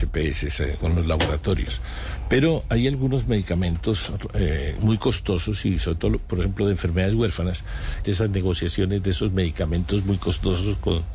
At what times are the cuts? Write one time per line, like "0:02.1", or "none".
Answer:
0:08.0